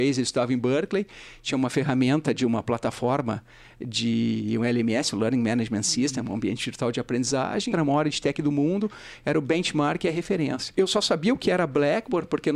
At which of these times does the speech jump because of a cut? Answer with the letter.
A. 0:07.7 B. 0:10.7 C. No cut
A